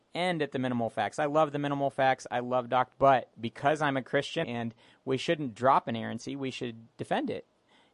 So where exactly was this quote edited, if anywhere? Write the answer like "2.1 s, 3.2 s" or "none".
2.9 s, 4.4 s